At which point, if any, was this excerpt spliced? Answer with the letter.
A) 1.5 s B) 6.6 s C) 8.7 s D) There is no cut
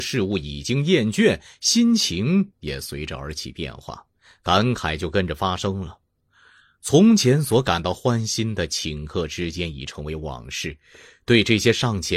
D